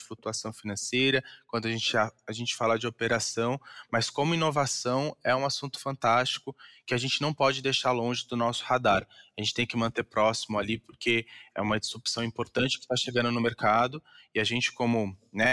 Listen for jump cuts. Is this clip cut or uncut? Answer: uncut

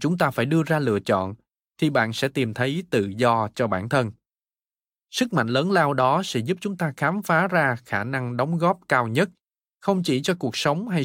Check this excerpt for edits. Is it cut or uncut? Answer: uncut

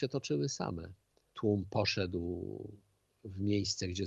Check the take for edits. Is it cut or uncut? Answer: uncut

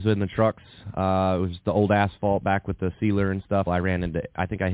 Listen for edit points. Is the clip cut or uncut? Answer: cut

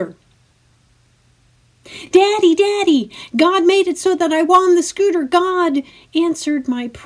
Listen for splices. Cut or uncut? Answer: uncut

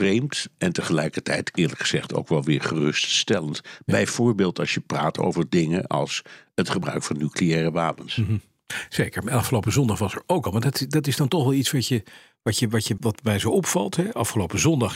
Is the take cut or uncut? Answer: cut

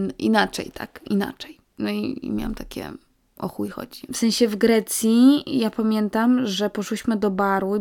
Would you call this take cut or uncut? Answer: cut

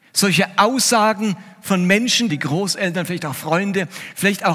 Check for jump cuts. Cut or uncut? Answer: cut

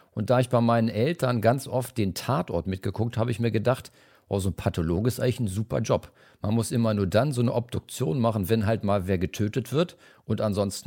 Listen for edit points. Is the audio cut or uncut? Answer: uncut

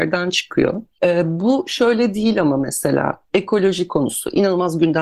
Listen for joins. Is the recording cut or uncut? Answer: uncut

